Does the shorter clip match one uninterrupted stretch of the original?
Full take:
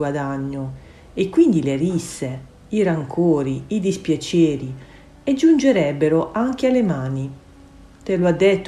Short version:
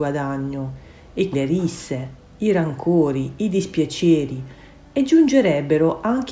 no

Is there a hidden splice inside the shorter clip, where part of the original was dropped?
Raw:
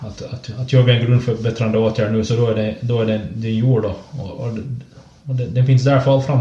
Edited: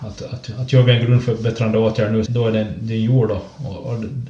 yes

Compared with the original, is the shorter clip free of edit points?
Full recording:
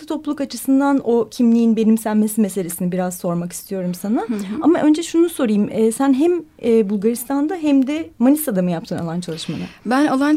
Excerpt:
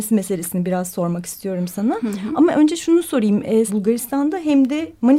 no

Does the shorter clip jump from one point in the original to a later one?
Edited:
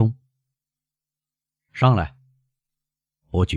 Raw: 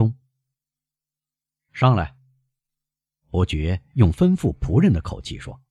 no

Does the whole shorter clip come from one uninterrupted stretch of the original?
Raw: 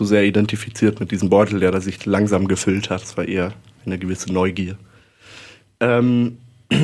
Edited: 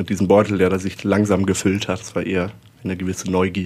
yes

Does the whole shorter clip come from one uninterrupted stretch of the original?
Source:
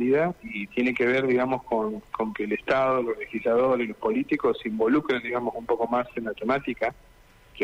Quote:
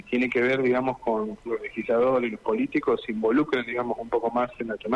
no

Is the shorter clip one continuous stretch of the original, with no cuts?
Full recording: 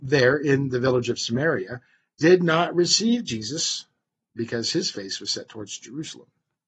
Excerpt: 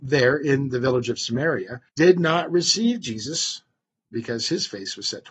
no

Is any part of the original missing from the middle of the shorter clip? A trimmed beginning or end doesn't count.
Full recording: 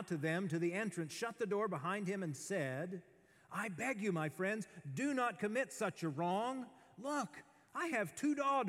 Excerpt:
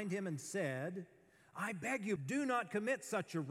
yes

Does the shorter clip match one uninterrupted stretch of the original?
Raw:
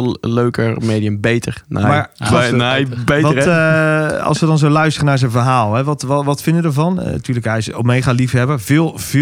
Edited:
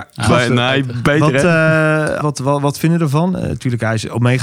no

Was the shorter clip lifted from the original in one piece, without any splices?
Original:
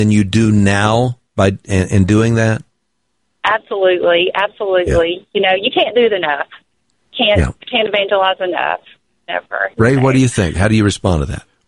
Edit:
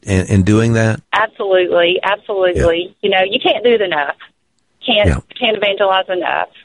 no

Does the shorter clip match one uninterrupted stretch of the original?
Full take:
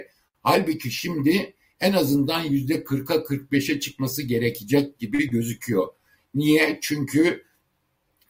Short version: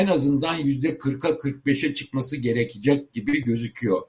yes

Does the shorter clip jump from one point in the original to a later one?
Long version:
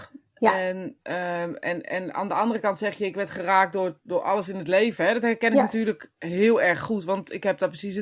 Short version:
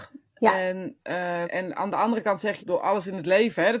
yes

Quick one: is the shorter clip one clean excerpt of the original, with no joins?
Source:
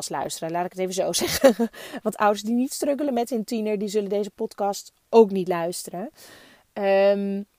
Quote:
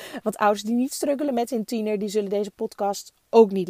yes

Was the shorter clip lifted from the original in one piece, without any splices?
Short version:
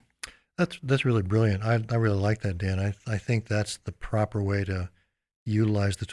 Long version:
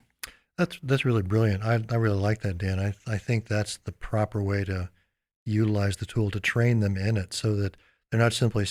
yes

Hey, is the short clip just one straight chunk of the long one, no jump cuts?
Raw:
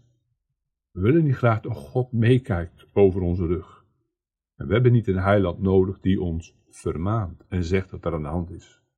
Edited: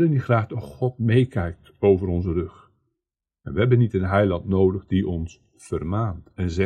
yes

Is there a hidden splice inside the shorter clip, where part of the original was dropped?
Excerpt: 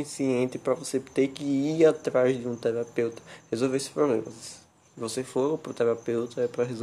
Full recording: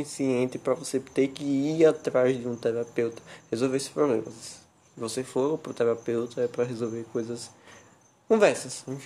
no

